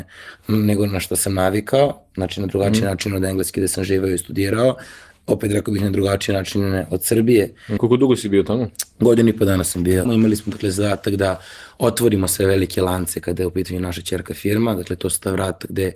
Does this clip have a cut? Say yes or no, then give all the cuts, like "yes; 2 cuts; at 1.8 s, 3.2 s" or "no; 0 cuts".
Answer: yes; 2 cuts; at 7.8 s, 10.1 s